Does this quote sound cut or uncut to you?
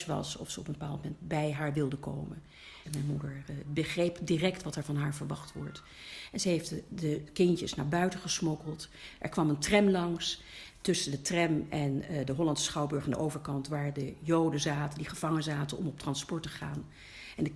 cut